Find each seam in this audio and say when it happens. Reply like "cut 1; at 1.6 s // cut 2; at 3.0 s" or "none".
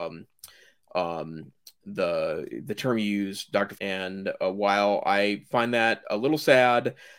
cut 1; at 3.7 s